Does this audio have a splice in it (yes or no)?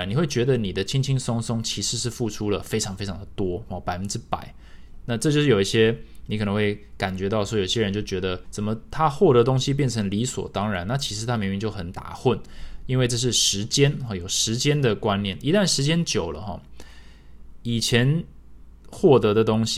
yes